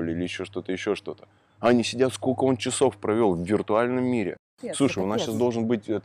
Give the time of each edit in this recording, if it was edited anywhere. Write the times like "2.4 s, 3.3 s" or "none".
none